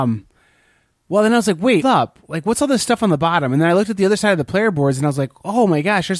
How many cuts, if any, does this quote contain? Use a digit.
1